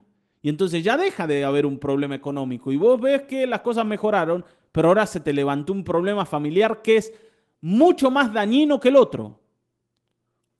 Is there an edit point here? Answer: no; 0 cuts

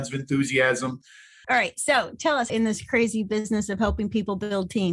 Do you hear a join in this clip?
yes; 2 cuts; at 1.4 s, 2.5 s

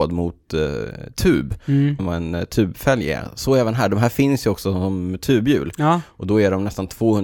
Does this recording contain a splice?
yes; 1 cut; at 2.0 s

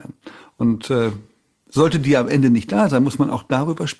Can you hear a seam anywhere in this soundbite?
no; 0 cuts

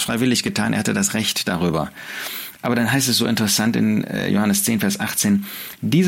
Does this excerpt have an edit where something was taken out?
no; 0 cuts

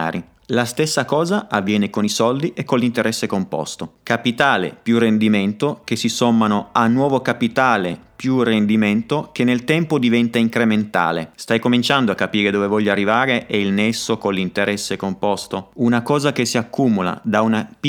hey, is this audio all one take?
no; 1 cut; at 11.3 s

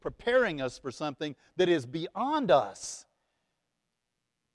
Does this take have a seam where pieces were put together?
no; 0 cuts

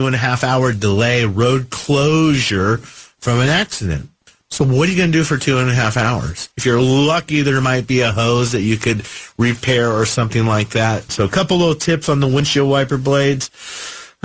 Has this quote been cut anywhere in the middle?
yes; 2 cuts; at 6.5 s, 11.1 s

